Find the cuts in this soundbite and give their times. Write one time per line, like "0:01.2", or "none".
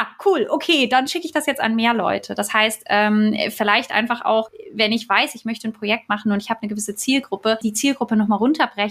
none